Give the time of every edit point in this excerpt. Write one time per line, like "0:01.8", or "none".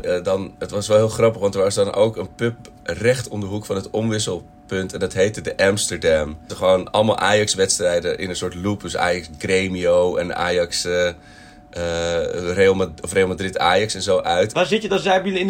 0:06.5
0:14.5